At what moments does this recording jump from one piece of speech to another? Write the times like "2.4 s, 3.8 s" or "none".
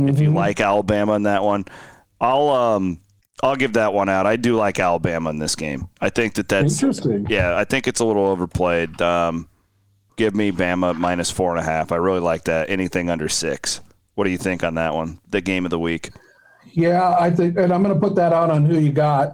none